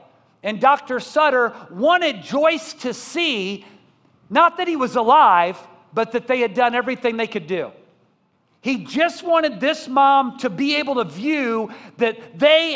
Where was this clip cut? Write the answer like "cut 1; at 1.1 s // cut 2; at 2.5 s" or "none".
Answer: none